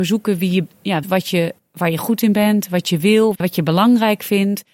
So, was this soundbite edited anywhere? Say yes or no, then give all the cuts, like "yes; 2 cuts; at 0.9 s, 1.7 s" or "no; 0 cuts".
yes; 2 cuts; at 1.0 s, 3.3 s